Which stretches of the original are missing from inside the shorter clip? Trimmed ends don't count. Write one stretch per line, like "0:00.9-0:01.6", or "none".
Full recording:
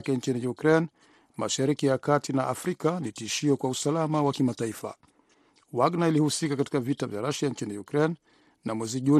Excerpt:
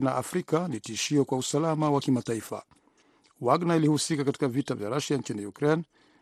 none